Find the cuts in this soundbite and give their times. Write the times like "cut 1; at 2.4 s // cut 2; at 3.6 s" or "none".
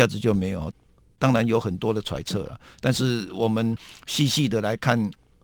none

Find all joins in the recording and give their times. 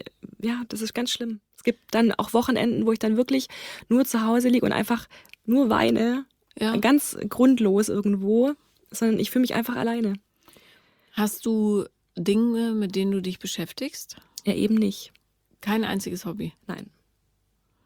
none

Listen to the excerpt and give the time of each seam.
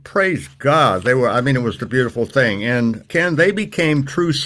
cut 1; at 1.8 s

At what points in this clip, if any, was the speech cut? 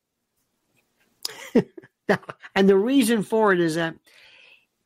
cut 1; at 1.3 s // cut 2; at 2.5 s

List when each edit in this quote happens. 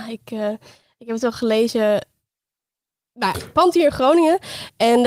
none

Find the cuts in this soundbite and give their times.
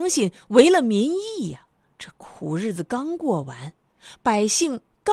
cut 1; at 1.9 s

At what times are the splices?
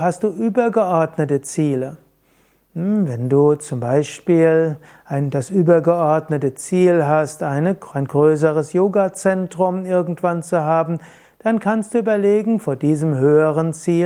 none

